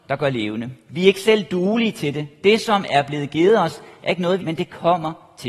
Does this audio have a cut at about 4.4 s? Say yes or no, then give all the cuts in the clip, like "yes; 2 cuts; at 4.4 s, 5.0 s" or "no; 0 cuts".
yes; 1 cut; at 4.4 s